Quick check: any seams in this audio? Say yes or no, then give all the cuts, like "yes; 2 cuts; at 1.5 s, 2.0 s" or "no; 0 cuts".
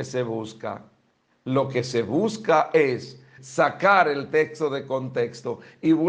yes; 1 cut; at 3.4 s